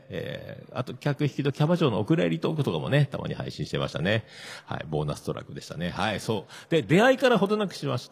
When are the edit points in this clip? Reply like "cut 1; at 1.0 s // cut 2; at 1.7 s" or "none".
none

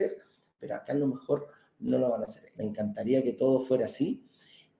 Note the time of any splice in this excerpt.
cut 1; at 2.5 s

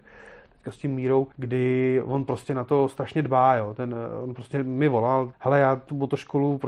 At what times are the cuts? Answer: cut 1; at 1.3 s // cut 2; at 5.3 s

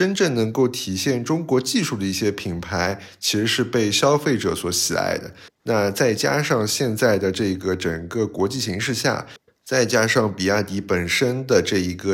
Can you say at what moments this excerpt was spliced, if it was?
cut 1; at 5.6 s // cut 2; at 9.5 s

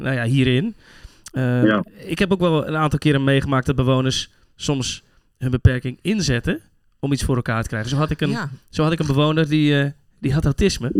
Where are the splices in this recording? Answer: none

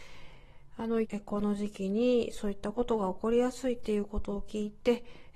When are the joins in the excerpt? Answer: cut 1; at 1.0 s

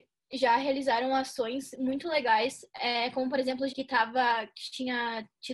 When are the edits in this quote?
cut 1; at 3.7 s

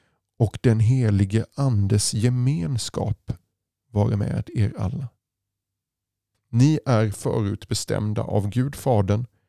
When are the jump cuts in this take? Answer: cut 1; at 6.3 s

